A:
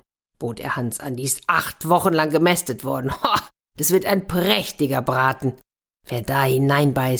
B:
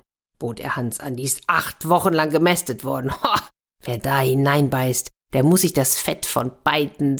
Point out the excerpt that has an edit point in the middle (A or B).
B